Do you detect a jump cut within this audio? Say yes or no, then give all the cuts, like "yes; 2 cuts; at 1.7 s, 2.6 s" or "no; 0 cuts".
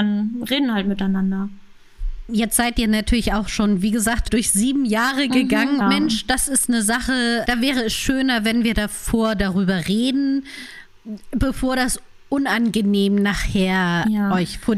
yes; 2 cuts; at 5.8 s, 7.5 s